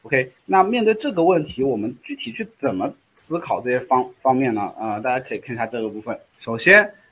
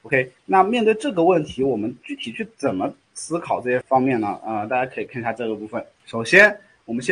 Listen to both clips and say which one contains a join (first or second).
second